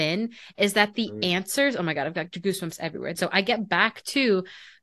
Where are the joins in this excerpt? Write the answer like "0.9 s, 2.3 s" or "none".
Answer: 3.2 s